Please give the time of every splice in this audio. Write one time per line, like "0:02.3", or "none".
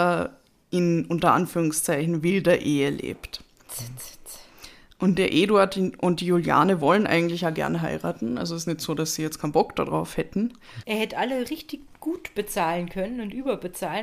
0:10.8